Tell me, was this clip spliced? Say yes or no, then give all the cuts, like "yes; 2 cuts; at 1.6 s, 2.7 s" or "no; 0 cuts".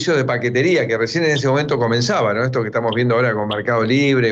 no; 0 cuts